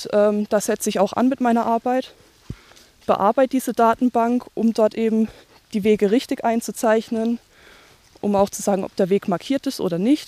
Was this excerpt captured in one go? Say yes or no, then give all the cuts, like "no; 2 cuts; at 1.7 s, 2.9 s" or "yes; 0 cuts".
yes; 0 cuts